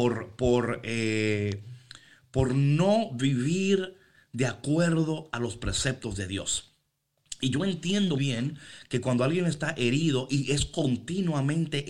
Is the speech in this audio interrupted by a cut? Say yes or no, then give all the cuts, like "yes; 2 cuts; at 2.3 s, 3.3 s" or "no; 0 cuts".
yes; 1 cut; at 8.2 s